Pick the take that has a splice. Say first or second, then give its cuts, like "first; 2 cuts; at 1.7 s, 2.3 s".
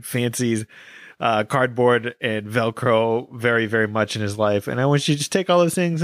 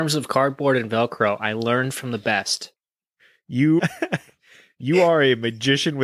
second; 1 cut; at 3.8 s